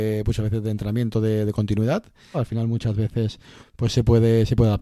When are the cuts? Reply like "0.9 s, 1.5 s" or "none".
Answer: 2.3 s, 3.6 s